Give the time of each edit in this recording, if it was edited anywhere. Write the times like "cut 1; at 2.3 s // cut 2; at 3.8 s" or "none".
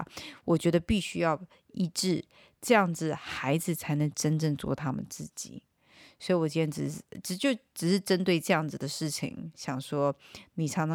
none

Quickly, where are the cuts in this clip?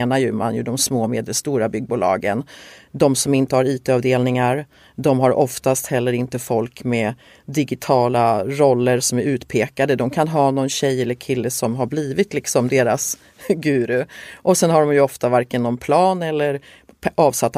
none

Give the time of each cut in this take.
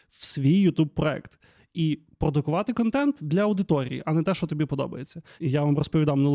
cut 1; at 5.4 s

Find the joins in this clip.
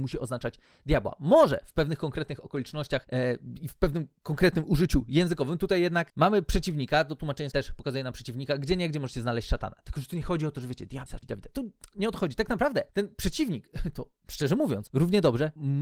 cut 1; at 7.5 s

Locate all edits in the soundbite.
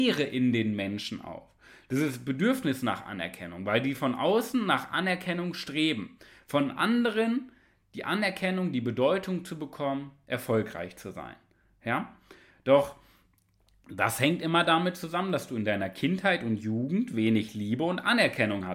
none

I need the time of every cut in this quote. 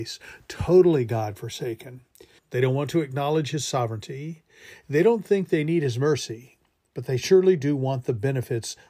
cut 1; at 2.4 s

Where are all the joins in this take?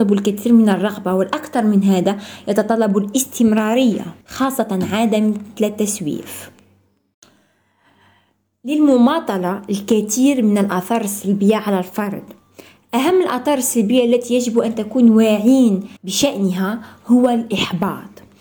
cut 1; at 4.2 s // cut 2; at 16.0 s

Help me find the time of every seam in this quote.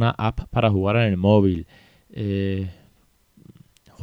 none

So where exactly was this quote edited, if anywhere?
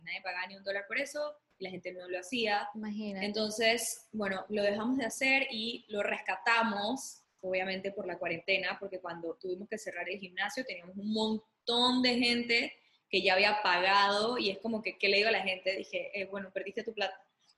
none

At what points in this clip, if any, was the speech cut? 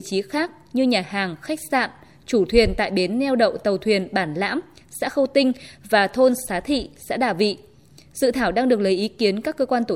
none

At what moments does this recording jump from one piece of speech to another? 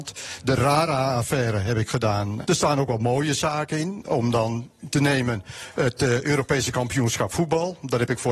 cut 1; at 2.4 s

